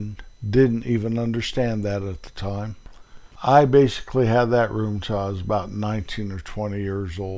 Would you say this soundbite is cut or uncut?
uncut